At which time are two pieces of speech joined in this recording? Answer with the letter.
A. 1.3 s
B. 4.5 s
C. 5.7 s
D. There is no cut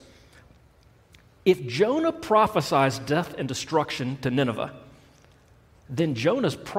C